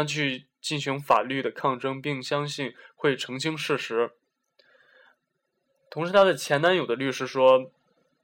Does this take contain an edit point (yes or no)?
no